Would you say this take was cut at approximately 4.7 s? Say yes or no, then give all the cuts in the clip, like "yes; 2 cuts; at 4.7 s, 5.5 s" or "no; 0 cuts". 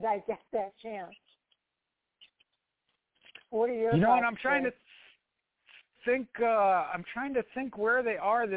no; 0 cuts